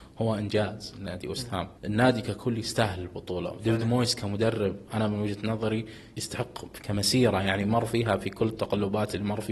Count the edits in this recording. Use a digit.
2